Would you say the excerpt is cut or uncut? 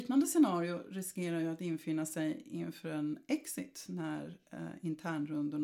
uncut